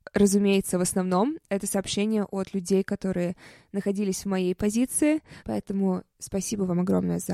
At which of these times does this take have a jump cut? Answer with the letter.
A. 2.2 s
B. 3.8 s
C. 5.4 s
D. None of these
C